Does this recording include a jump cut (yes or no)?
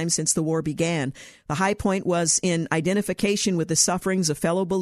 no